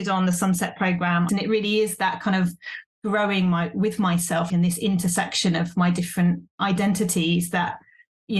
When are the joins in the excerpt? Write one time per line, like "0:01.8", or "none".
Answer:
0:01.3
0:04.5